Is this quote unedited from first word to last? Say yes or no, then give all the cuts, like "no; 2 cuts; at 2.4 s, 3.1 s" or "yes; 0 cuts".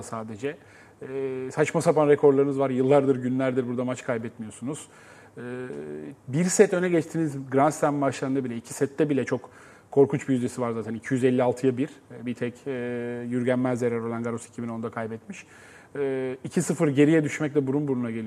yes; 0 cuts